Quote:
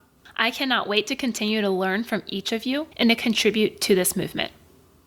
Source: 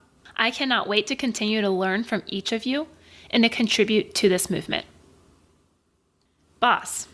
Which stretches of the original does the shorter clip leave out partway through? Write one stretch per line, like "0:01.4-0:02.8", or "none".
0:02.9-0:03.3

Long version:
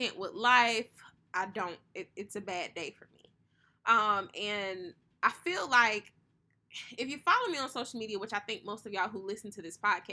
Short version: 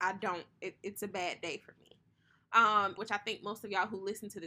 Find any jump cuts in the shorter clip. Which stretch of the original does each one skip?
0:04.3-0:08.2

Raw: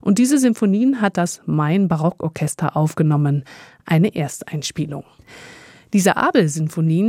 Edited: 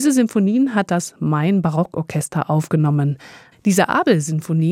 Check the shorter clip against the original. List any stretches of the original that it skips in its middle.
0:03.8-0:05.8

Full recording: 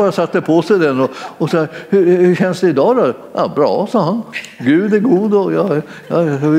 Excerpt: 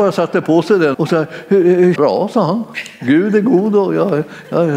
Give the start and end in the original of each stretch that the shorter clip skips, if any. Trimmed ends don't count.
0:00.9-0:01.4
0:02.4-0:03.5

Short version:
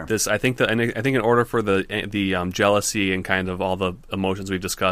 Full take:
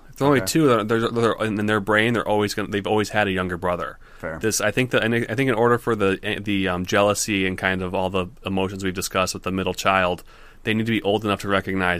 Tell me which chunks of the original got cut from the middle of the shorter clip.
none

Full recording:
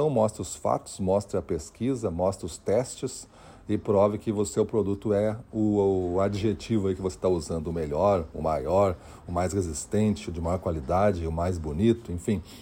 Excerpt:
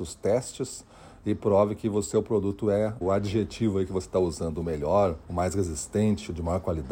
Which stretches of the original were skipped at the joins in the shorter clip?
0:05.4-0:06.1
0:08.3-0:09.2

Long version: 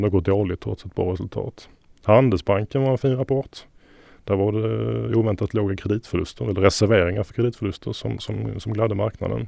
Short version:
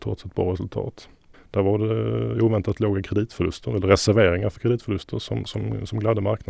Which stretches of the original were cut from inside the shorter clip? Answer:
0:01.9-0:04.1

